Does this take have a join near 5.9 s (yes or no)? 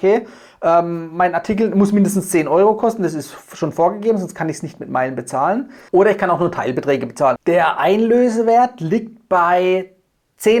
yes